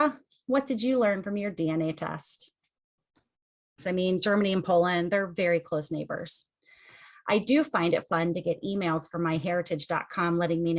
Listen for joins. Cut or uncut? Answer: cut